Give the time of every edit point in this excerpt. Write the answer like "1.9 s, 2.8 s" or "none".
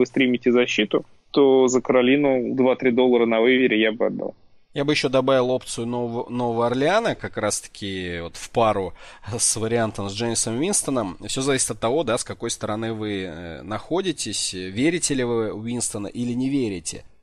none